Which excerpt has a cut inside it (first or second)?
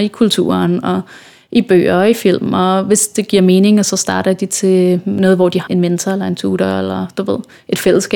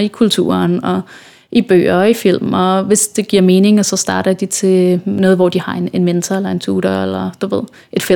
first